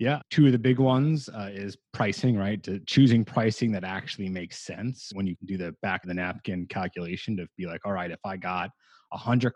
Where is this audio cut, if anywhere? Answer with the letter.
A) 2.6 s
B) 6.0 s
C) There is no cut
B